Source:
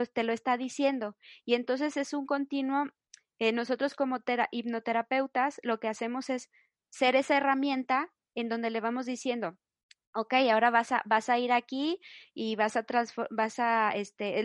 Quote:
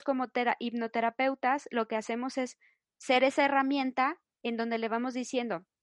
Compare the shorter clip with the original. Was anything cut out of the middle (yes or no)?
no